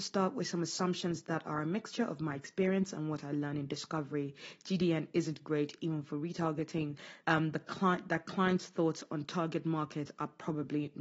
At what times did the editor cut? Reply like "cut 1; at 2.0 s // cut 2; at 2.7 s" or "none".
cut 1; at 7.2 s